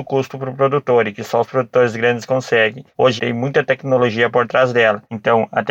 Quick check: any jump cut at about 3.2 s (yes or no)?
yes